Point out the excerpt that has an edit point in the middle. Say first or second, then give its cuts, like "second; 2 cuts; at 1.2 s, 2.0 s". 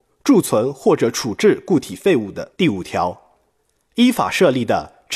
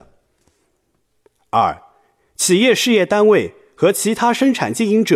first; 1 cut; at 2.5 s